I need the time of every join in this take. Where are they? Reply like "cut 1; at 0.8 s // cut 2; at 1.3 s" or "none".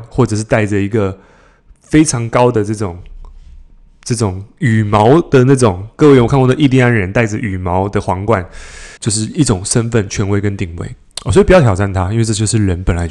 cut 1; at 9.0 s